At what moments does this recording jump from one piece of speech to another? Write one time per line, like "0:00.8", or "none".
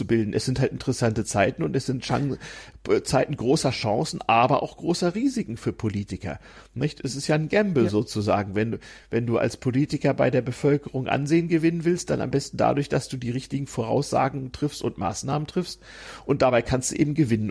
none